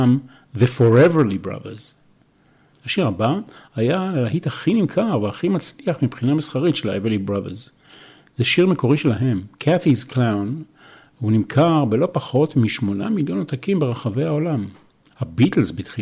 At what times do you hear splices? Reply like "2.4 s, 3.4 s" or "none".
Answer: 2.7 s, 15.1 s